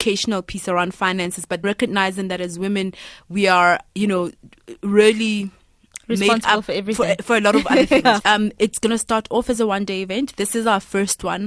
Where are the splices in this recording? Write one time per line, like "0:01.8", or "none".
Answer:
0:01.6
0:08.2